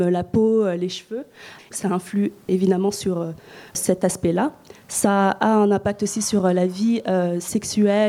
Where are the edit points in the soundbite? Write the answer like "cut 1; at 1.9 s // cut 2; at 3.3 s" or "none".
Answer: cut 1; at 1.6 s